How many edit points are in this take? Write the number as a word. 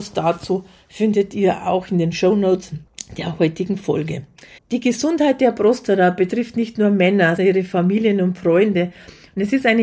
two